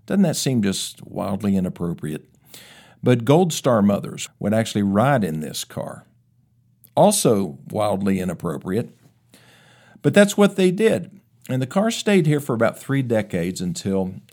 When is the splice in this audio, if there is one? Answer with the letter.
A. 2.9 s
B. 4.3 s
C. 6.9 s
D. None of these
B